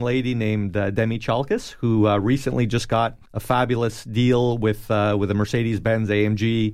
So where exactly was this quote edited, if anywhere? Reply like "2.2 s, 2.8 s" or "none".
3.3 s